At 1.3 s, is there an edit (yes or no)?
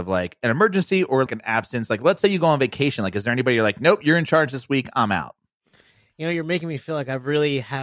yes